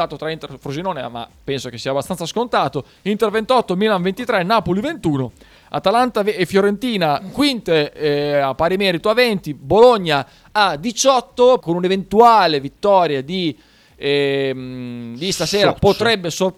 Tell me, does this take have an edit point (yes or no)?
yes